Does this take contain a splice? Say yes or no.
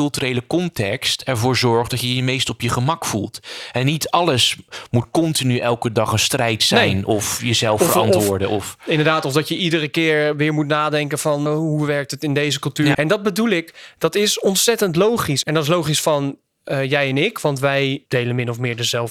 yes